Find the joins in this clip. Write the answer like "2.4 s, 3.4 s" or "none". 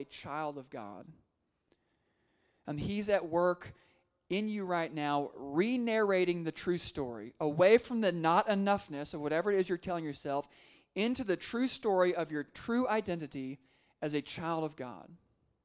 none